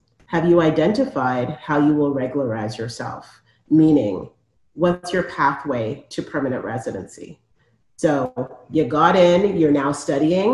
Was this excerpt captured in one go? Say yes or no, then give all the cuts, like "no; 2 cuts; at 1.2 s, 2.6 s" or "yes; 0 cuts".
yes; 0 cuts